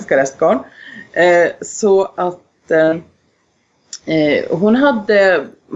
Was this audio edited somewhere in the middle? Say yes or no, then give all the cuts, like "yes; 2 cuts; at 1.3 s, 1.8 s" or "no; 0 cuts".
no; 0 cuts